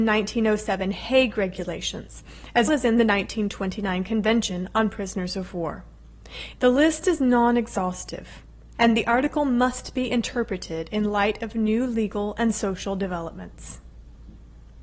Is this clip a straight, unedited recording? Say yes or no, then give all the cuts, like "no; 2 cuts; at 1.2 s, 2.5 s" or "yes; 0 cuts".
no; 3 cuts; at 2.7 s, 6.5 s, 8.7 s